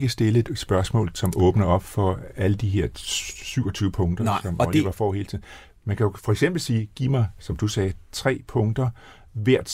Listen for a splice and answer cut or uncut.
uncut